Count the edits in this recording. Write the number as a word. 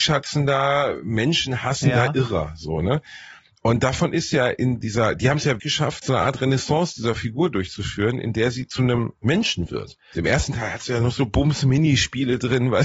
two